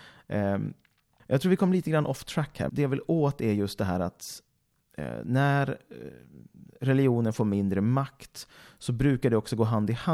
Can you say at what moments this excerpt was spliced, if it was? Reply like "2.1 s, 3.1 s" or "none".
1.2 s, 2.7 s